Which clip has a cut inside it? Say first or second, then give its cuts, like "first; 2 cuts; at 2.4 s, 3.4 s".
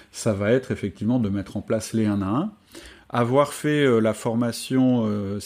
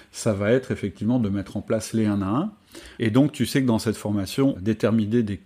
second; 2 cuts; at 3.0 s, 4.5 s